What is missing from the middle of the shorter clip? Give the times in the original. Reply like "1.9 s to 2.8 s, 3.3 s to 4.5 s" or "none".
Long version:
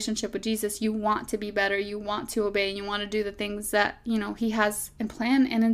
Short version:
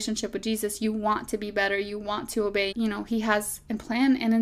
2.7 s to 4.0 s